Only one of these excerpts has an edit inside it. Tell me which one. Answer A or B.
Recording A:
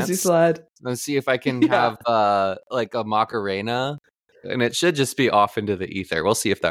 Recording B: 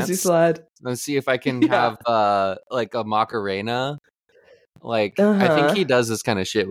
A